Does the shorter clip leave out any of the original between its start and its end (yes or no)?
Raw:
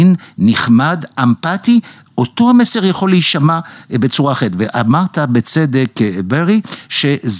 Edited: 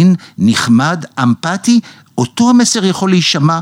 no